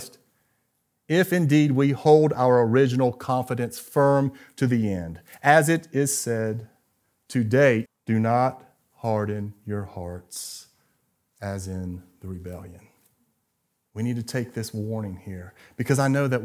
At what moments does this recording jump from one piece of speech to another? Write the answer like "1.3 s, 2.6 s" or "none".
7.9 s, 13.9 s